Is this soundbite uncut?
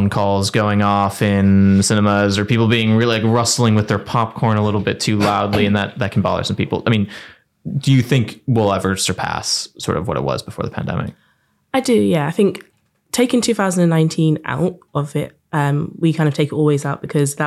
yes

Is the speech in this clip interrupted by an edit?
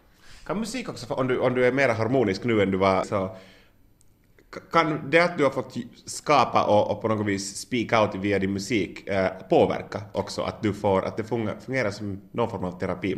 yes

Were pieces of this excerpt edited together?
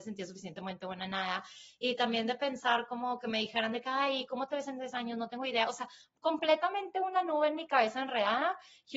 no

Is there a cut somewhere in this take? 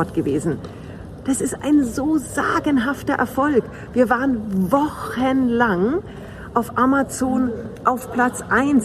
yes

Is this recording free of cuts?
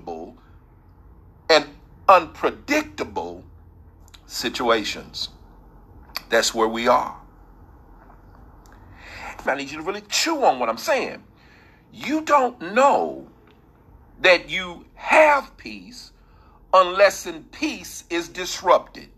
no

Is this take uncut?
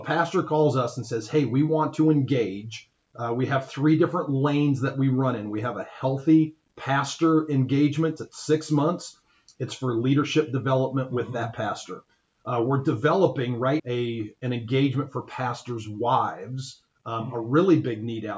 no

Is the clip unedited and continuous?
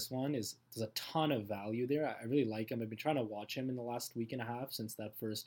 yes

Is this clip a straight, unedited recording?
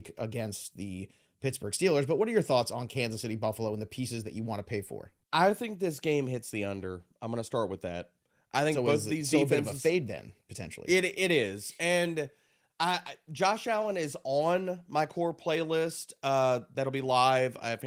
yes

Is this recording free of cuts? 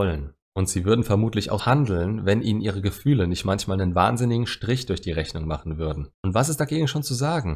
no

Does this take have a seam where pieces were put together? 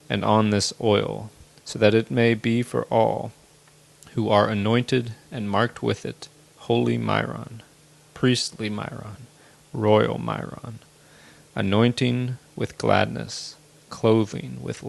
yes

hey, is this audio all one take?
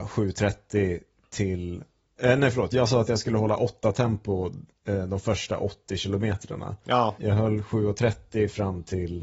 no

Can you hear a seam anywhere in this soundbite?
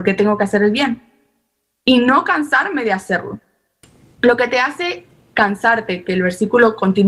yes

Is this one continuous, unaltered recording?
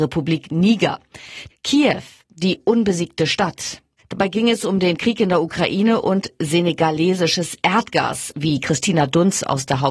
no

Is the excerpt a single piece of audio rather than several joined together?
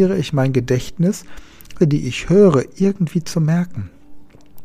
no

